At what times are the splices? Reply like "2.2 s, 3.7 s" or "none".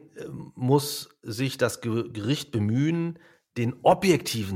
none